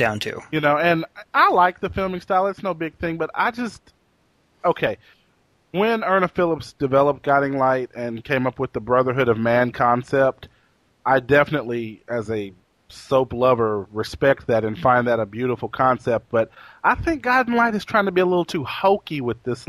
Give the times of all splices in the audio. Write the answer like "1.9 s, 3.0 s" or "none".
none